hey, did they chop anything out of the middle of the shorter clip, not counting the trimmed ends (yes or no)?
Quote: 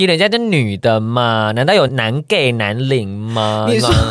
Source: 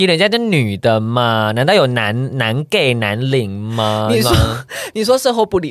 yes